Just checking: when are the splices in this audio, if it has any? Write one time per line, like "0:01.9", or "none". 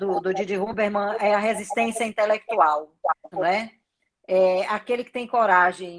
0:03.3